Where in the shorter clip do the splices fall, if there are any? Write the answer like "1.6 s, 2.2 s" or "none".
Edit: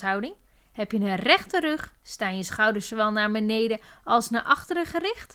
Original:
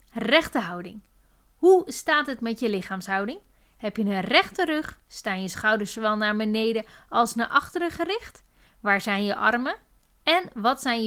none